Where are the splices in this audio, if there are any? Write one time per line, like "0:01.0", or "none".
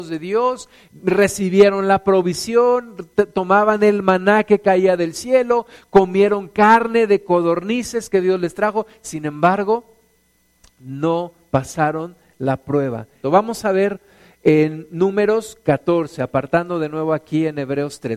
0:13.2